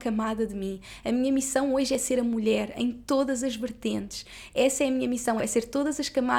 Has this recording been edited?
yes; 1 cut; at 5.4 s

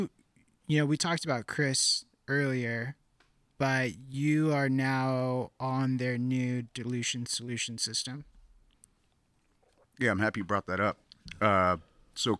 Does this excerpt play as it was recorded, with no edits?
yes; 0 cuts

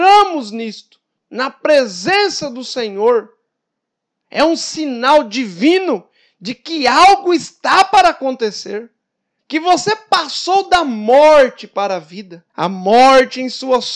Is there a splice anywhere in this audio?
yes; 2 cuts; at 9.4 s, 12.5 s

